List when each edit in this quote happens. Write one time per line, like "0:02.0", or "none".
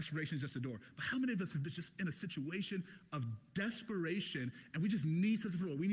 none